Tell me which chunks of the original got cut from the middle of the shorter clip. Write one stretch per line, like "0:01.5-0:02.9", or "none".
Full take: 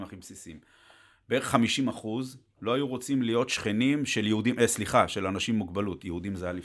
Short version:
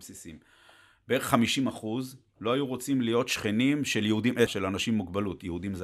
0:04.7-0:05.1